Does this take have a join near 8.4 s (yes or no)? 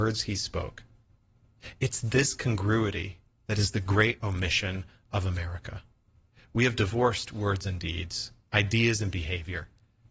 no